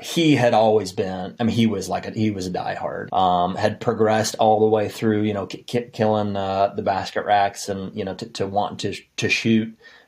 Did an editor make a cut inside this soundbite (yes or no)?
yes